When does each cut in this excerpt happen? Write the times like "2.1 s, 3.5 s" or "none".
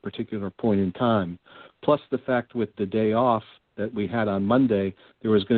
2.7 s